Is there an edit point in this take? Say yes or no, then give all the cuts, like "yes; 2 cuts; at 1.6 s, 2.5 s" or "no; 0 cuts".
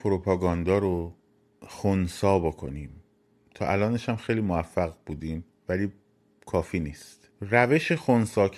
yes; 1 cut; at 7.3 s